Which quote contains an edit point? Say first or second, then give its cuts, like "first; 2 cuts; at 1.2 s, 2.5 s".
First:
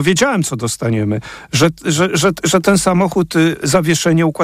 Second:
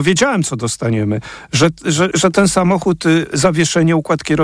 second; 1 cut; at 2.1 s